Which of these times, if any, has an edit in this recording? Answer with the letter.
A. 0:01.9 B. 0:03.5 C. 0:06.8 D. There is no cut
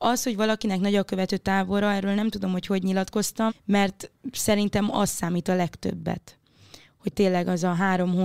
B